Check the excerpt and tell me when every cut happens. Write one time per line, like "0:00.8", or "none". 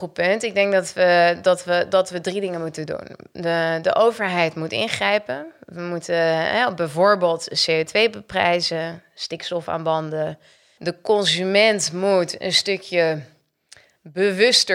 0:10.8